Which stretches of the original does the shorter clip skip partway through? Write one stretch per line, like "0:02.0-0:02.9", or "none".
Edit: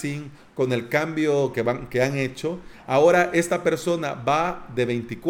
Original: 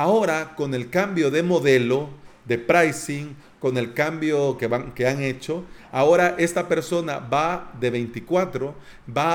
none